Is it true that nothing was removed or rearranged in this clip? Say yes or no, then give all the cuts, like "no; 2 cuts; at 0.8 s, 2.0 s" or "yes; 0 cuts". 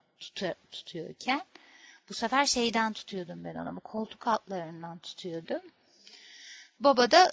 yes; 0 cuts